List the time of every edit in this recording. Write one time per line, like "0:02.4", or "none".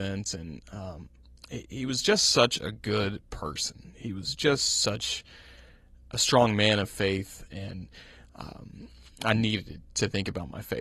0:07.5